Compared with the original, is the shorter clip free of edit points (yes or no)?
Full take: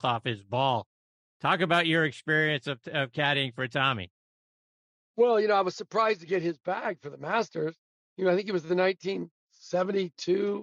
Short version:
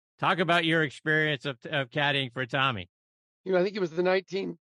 no